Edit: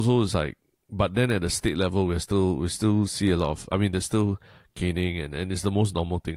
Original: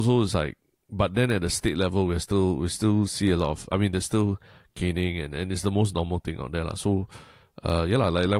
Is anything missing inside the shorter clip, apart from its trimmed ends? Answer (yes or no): no